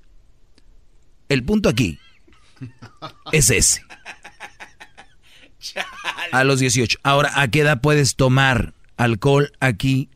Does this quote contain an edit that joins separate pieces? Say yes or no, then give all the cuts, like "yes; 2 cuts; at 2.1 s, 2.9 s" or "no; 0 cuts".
no; 0 cuts